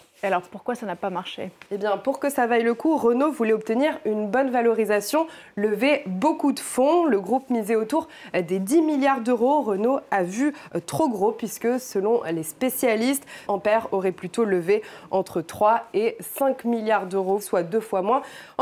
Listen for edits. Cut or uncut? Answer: cut